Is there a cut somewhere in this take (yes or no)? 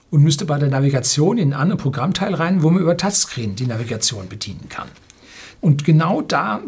yes